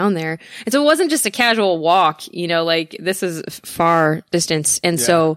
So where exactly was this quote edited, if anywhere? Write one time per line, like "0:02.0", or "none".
none